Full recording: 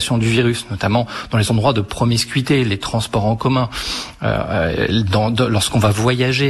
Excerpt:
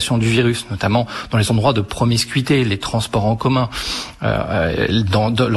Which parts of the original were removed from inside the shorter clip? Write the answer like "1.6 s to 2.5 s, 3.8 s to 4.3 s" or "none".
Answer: none